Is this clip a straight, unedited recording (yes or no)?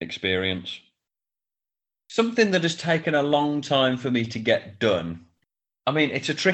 yes